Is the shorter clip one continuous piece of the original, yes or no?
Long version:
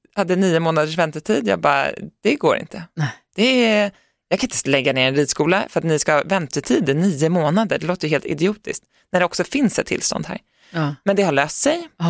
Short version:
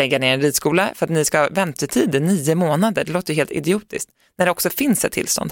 yes